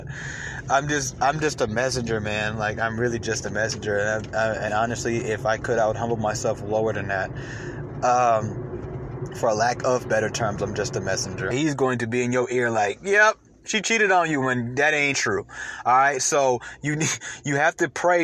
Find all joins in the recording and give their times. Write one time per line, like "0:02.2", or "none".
0:11.5
0:15.1